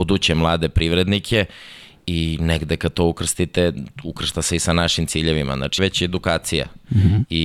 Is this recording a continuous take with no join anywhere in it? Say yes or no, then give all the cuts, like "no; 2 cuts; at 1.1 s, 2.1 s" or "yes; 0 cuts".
no; 1 cut; at 5.8 s